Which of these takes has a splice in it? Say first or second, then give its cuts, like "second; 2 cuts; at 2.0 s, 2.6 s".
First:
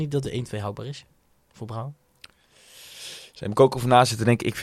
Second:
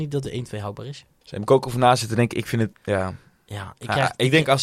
second; 2 cuts; at 1.2 s, 2.7 s